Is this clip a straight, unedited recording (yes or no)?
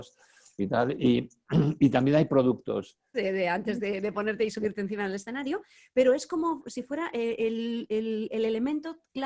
no